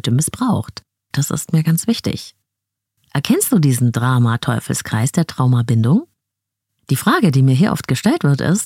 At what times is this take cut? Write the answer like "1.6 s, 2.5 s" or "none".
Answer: 1.1 s